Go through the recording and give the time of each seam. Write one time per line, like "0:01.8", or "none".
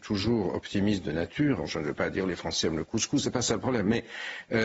0:01.6